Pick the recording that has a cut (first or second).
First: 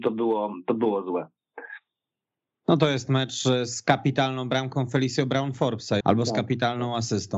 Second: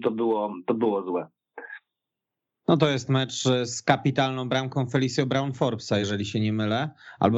first